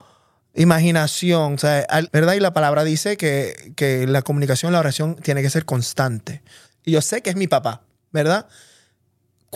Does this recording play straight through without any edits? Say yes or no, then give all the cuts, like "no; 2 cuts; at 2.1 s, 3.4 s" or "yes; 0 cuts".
no; 2 cuts; at 2.1 s, 6.7 s